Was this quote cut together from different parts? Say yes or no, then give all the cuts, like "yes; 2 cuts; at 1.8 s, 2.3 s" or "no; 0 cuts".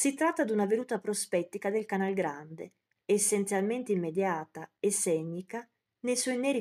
yes; 1 cut; at 2.9 s